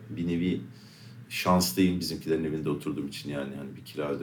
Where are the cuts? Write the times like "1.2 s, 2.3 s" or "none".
none